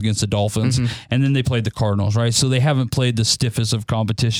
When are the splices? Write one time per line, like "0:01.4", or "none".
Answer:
none